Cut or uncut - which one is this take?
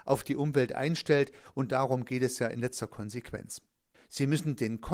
cut